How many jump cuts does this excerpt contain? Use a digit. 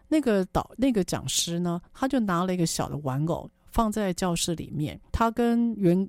1